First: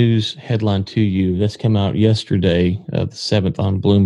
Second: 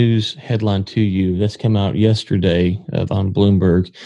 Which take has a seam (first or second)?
second